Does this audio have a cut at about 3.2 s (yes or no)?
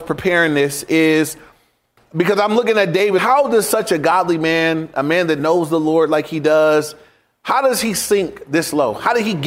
yes